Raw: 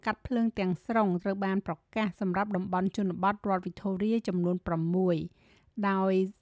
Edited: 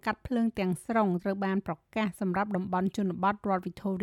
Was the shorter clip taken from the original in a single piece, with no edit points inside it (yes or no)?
yes